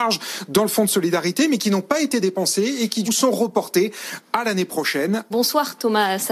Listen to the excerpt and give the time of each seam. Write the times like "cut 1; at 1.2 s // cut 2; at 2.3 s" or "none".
cut 1; at 3.1 s // cut 2; at 5.3 s